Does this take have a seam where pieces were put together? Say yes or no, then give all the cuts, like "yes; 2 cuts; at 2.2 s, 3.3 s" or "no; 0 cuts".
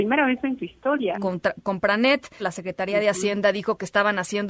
yes; 2 cuts; at 1.1 s, 2.4 s